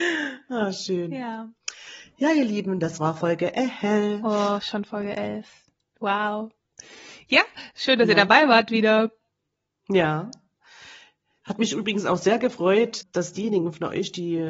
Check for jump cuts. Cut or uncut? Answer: uncut